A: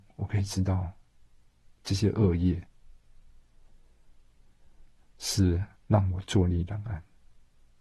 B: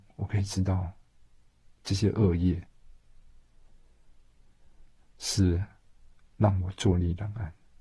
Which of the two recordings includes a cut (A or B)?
A